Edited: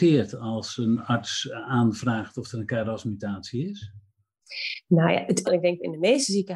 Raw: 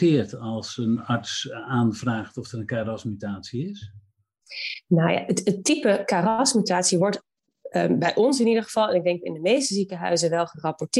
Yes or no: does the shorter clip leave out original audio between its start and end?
yes